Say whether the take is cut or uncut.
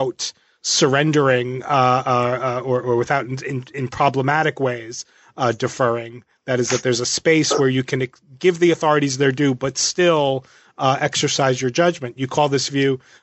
uncut